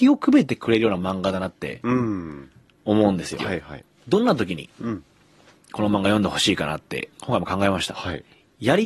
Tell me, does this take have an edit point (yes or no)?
yes